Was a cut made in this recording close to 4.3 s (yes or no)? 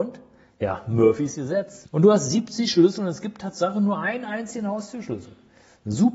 no